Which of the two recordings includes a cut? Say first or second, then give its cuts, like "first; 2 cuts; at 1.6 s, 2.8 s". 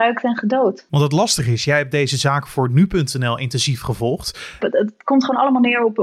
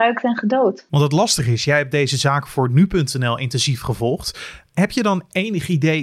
first; 1 cut; at 4.6 s